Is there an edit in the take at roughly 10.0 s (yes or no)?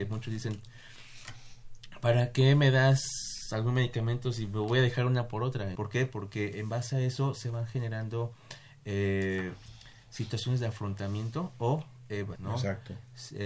no